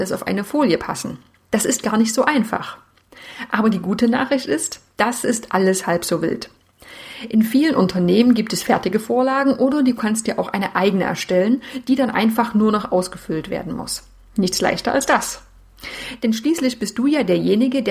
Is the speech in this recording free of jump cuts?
yes; 0 cuts

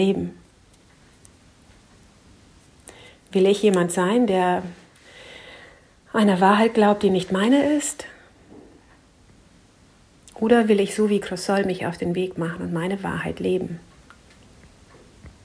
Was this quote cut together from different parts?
no; 0 cuts

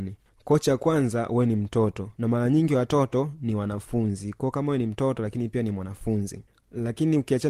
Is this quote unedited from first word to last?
no; 1 cut; at 2.1 s

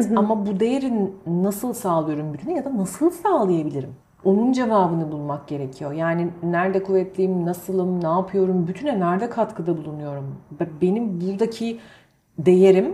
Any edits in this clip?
yes; 1 cut; at 4.0 s

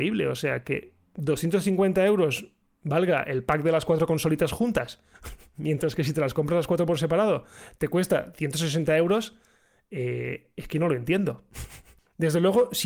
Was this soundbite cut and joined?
no; 0 cuts

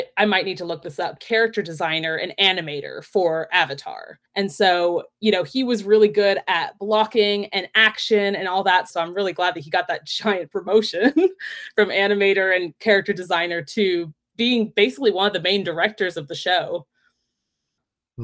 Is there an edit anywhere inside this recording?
yes; 2 cuts; at 1.2 s, 4.3 s

